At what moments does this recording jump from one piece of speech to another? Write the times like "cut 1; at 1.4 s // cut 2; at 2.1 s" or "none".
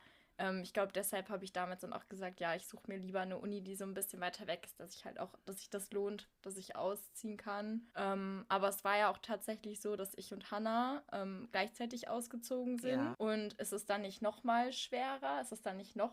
cut 1; at 7.9 s // cut 2; at 13.1 s